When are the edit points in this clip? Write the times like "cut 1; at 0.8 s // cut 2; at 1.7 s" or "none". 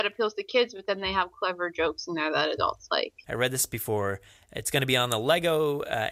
cut 1; at 3.2 s